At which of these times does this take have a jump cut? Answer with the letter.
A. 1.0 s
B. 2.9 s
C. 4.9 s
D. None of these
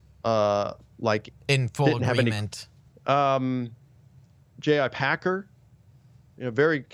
B